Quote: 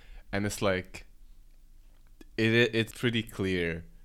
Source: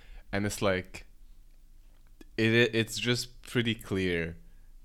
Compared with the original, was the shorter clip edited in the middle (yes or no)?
yes